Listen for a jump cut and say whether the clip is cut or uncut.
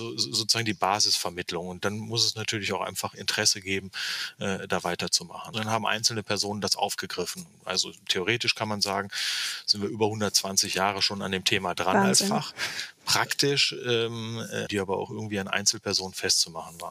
cut